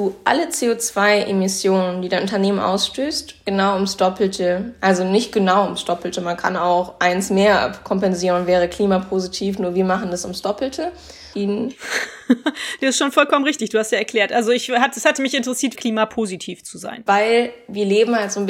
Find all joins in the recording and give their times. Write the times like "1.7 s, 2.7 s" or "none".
11.3 s, 15.7 s, 17.1 s